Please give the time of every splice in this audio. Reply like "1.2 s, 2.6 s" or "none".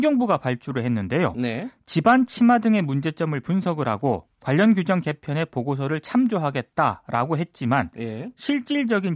none